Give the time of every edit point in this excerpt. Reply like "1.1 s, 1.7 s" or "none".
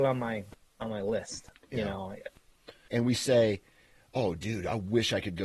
2.9 s